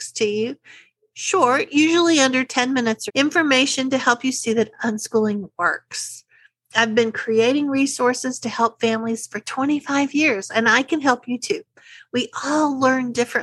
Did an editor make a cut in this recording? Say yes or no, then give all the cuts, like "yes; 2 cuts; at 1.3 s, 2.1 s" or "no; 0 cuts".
yes; 1 cut; at 3.1 s